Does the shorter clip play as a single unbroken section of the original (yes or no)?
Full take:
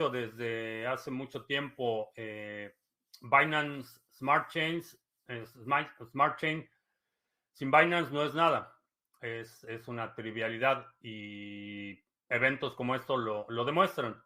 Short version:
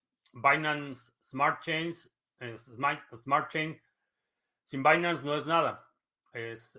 yes